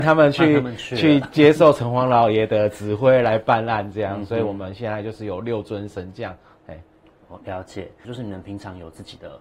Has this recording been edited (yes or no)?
yes